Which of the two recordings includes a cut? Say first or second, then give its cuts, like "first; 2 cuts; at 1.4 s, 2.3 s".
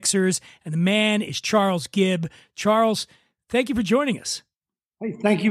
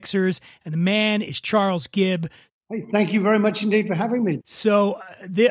second; 2 cuts; at 2.5 s, 4.4 s